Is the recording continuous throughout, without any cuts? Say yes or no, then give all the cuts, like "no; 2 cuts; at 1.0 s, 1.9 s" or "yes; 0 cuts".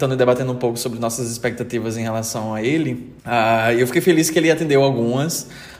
no; 1 cut; at 3.2 s